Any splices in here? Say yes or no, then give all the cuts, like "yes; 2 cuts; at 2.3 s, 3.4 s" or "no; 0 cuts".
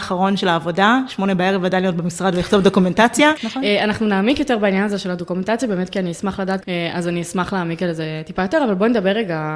yes; 2 cuts; at 3.4 s, 6.6 s